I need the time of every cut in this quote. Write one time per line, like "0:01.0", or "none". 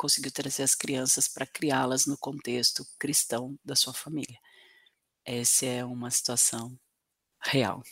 none